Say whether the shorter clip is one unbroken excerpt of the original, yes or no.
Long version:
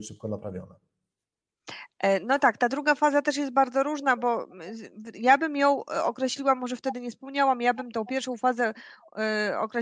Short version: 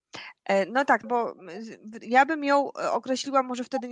no